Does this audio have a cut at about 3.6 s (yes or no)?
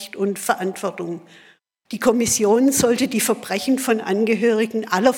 no